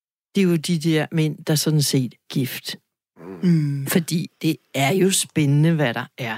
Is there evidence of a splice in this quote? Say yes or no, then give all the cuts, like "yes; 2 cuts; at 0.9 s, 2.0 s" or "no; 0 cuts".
yes; 2 cuts; at 2.3 s, 3.9 s